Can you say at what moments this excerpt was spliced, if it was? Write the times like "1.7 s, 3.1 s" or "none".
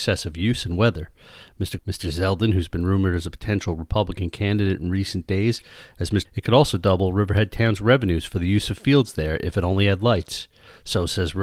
1.8 s, 6.2 s

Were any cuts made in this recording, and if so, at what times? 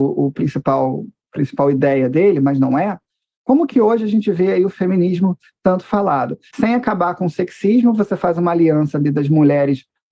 6.5 s

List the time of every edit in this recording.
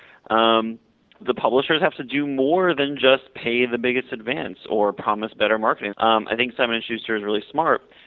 1.2 s, 5.9 s

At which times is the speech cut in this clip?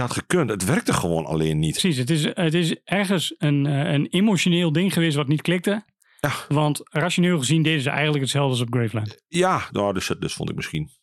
9.7 s

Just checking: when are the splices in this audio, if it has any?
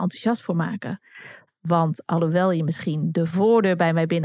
1.5 s

